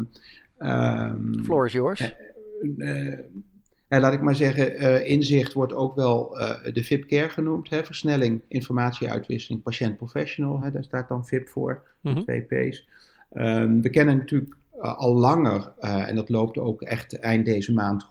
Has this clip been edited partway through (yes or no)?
no